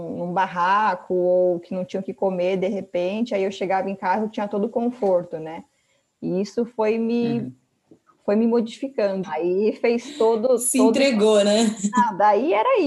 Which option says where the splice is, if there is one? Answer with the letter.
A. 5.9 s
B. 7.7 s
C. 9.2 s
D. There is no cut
C